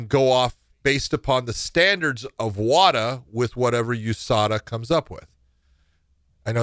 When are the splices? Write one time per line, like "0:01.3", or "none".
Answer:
none